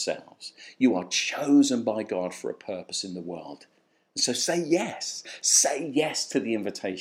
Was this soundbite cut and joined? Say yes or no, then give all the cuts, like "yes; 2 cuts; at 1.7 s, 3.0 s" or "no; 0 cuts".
no; 0 cuts